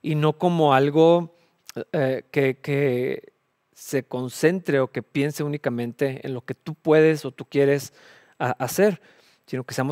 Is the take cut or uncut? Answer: uncut